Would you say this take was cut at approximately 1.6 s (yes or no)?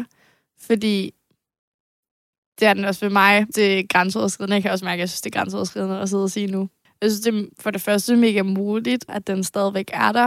no